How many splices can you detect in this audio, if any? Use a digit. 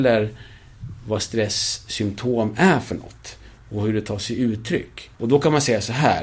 1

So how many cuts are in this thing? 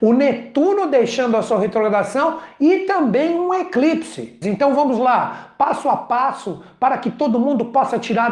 1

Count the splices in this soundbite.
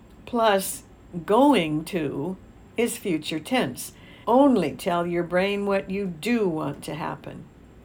1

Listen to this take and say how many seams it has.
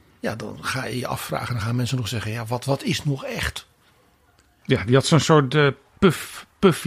1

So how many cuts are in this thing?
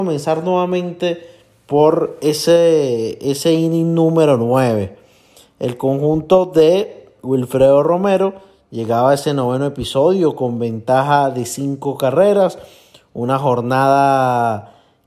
0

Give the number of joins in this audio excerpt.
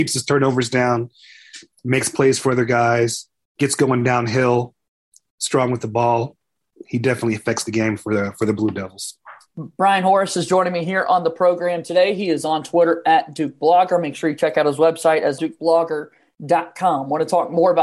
1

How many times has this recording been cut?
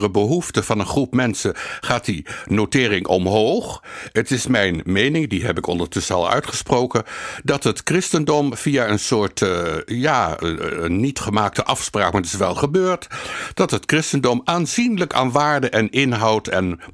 0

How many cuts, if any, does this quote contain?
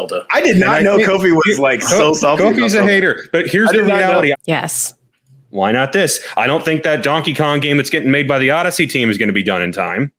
1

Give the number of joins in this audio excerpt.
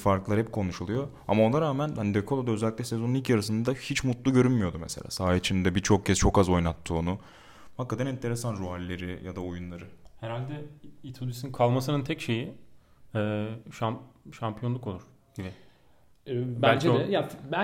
0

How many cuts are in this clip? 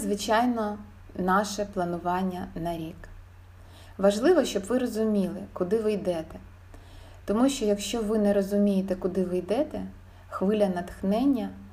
0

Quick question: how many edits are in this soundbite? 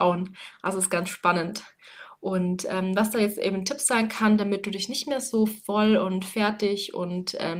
0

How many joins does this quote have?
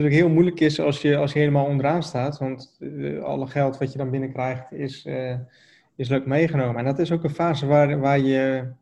0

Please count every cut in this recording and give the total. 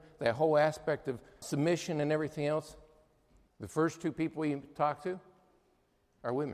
2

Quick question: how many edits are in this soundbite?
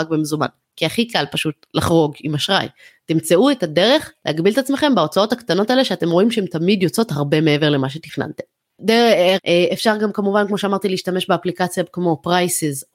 2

